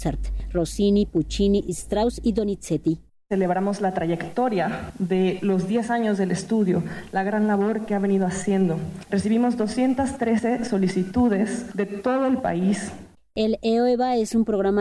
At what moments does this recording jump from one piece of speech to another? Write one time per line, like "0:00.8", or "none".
0:09.1